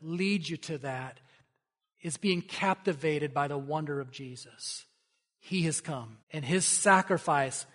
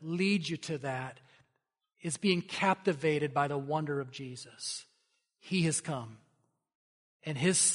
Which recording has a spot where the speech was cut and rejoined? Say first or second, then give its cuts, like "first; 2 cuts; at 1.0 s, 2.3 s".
first; 1 cut; at 6.2 s